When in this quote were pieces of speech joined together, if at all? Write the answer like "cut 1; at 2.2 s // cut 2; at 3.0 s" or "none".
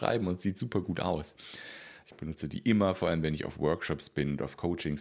cut 1; at 2.0 s